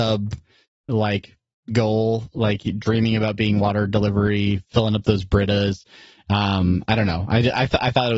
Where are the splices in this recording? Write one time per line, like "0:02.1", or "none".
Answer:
none

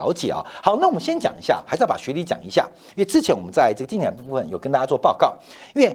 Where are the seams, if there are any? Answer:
0:01.7

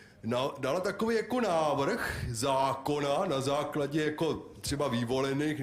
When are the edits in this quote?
none

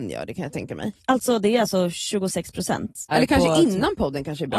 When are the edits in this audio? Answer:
0:03.1

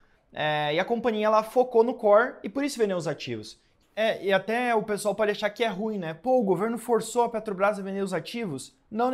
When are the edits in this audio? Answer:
0:03.8

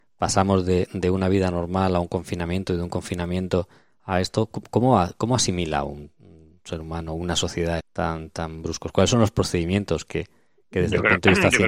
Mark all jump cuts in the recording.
0:07.8

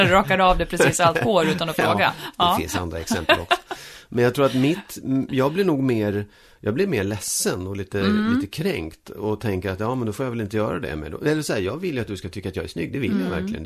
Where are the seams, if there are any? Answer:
none

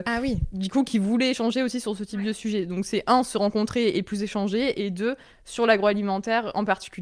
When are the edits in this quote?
none

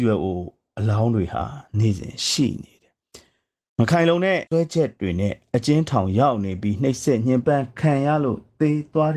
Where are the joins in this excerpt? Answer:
0:04.5

